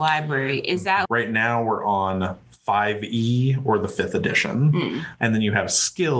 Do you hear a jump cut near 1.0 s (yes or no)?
yes